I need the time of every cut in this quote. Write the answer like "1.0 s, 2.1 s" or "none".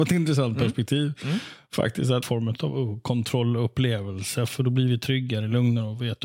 2.2 s